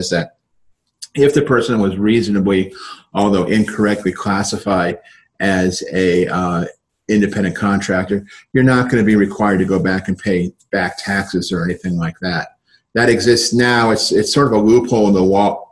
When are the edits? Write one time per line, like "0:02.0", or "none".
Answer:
none